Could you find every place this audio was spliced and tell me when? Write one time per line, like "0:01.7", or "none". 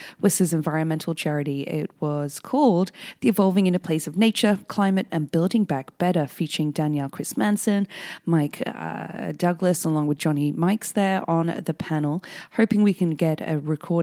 0:05.1